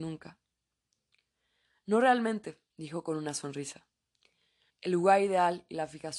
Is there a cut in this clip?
yes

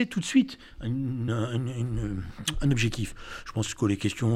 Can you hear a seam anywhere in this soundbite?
no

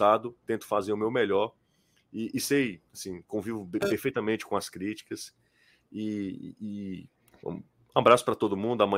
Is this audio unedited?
yes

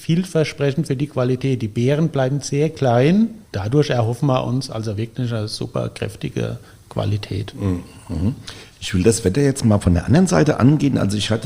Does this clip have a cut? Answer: no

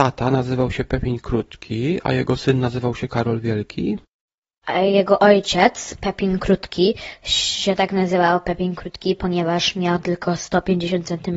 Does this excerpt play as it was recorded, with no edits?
yes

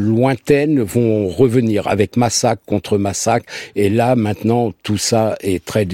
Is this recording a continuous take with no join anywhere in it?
yes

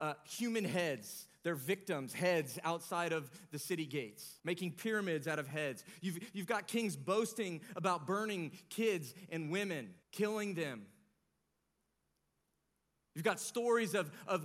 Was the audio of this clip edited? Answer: yes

